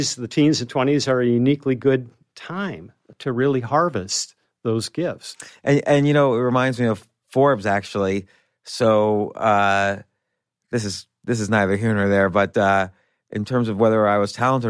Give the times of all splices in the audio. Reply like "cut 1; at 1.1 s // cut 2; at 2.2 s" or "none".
none

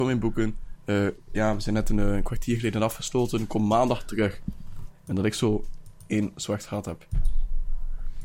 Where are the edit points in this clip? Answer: cut 1; at 4.9 s

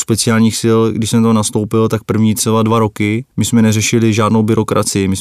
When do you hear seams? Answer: cut 1; at 3.3 s

